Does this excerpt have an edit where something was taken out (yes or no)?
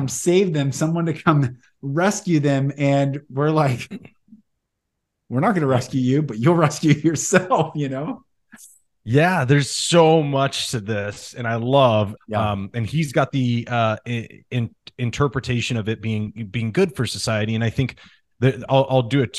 yes